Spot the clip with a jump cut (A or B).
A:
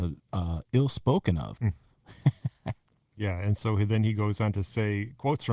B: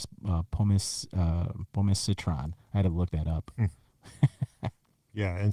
A